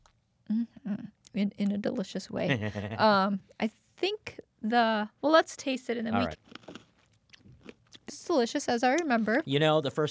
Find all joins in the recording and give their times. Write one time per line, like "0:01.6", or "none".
0:06.3
0:08.1